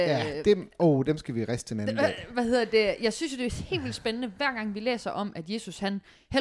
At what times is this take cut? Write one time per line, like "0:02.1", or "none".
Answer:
none